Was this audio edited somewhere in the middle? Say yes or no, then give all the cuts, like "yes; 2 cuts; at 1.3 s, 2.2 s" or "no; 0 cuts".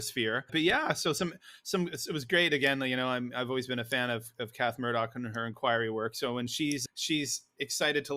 no; 0 cuts